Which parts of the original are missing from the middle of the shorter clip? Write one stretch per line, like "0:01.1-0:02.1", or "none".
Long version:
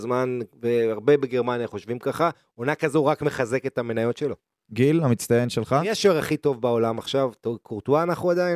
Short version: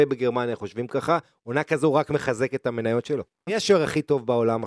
0:04.6-0:05.8